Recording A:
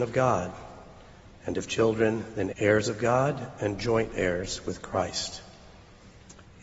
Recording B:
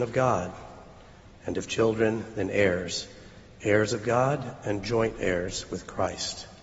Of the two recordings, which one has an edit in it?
A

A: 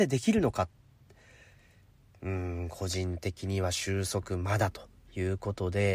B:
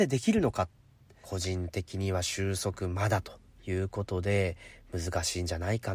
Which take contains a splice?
B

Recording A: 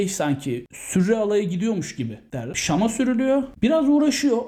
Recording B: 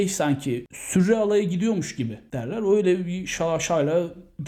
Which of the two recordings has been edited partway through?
A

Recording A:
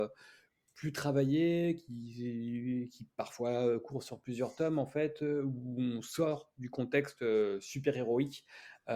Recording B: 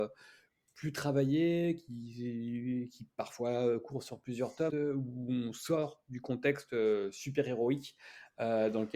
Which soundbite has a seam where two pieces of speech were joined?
B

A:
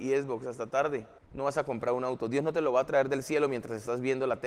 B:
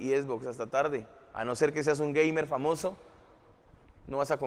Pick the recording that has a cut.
A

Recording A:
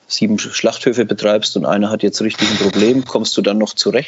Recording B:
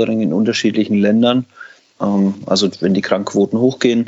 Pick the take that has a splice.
B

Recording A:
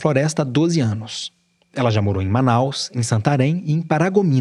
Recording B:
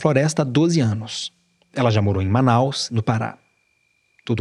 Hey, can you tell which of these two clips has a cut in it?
B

